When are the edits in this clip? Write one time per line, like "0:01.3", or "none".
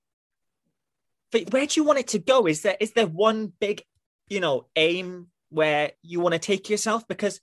0:01.5